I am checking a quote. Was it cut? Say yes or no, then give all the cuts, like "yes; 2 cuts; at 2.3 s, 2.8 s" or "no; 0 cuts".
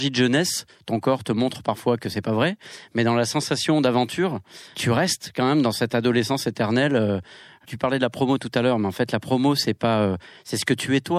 no; 0 cuts